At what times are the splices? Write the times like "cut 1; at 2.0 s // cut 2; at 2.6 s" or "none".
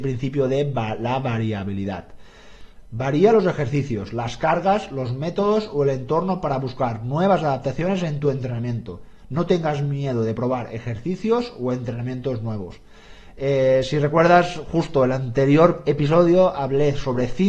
cut 1; at 2.9 s